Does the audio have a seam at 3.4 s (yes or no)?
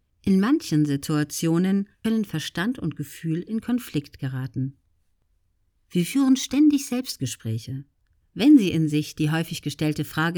no